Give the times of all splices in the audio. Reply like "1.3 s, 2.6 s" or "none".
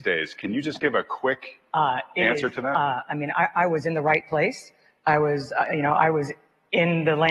none